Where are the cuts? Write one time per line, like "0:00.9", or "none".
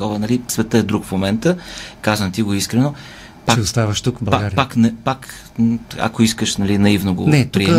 0:02.0

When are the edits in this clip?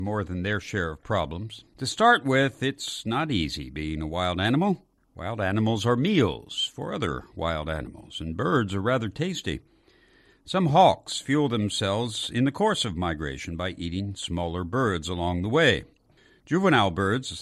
0:01.7

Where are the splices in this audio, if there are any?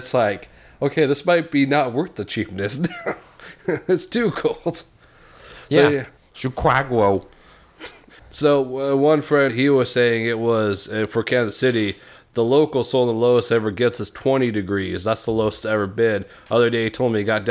0:06.2
0:08.2
0:09.5

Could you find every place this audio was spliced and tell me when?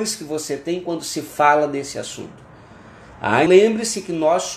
0:03.5

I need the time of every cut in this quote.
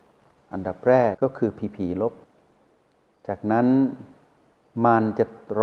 0:01.1

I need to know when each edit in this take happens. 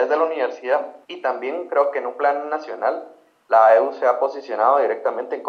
0:01.0

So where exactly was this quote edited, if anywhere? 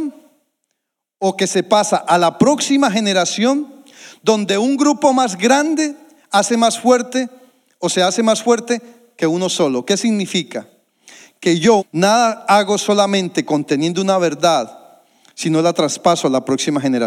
0:11.8

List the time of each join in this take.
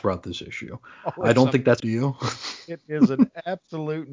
0:01.8

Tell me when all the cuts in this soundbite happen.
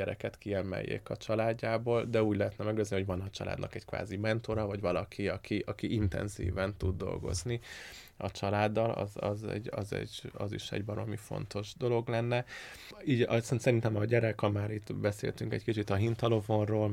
none

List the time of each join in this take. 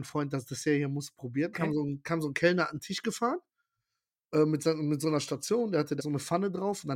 0:01.5
0:06.0

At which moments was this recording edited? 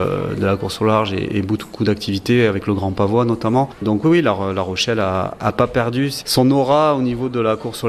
none

